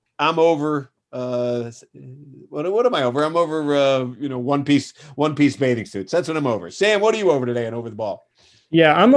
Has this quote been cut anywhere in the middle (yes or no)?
no